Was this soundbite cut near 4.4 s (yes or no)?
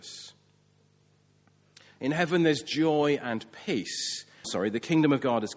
yes